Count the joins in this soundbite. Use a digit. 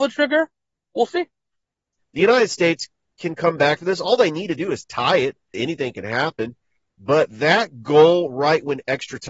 2